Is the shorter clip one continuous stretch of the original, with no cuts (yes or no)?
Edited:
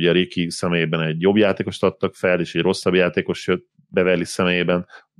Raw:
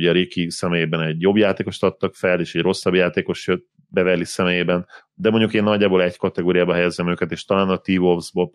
yes